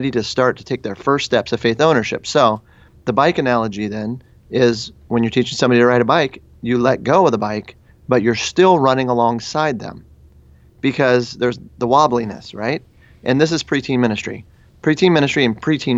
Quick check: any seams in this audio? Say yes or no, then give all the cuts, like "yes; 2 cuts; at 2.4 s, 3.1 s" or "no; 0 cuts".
no; 0 cuts